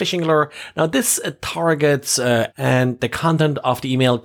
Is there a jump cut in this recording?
yes; 1 cut; at 2.5 s

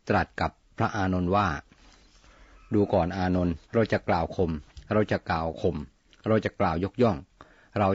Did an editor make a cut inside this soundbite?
yes; 1 cut; at 3.6 s

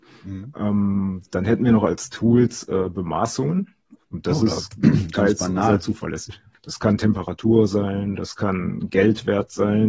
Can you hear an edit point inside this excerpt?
yes; 2 cuts; at 4.0 s, 6.5 s

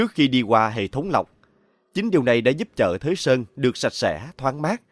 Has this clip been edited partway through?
no; 0 cuts

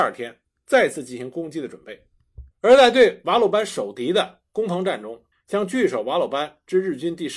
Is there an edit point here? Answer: yes; 2 cuts; at 2.5 s, 5.3 s

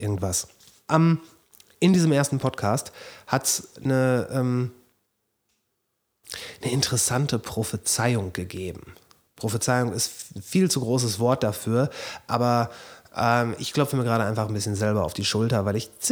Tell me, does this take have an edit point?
no; 0 cuts

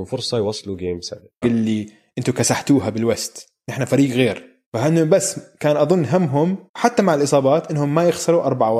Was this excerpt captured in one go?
no; 3 cuts; at 1.4 s, 4.6 s, 6.7 s

